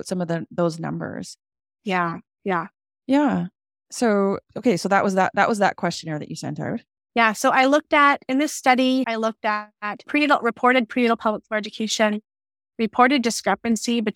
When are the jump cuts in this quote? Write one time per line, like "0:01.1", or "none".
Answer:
0:07.0